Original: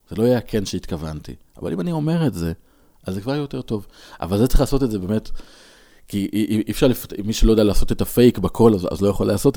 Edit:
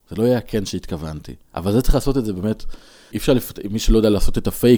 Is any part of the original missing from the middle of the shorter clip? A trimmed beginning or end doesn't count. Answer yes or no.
yes